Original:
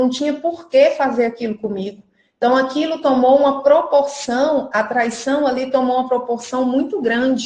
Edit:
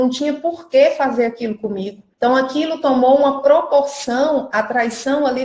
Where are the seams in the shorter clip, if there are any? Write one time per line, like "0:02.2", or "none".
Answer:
0:02.1